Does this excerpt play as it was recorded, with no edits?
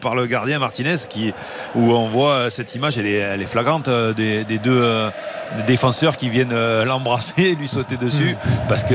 yes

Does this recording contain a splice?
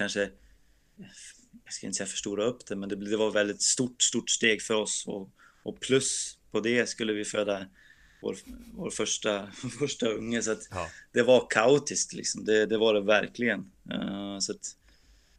no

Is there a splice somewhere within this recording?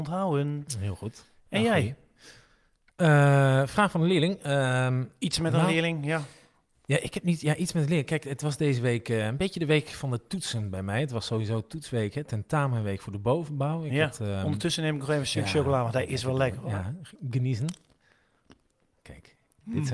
no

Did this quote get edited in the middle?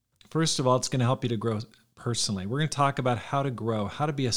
no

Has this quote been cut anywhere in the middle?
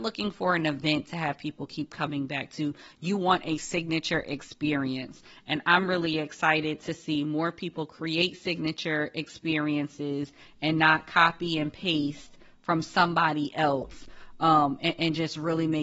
no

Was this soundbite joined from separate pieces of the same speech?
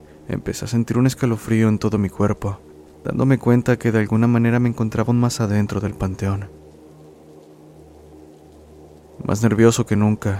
no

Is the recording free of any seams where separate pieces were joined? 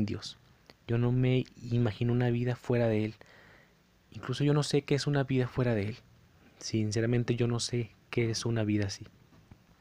yes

